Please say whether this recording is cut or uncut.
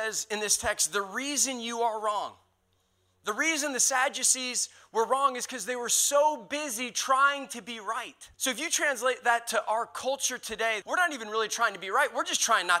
cut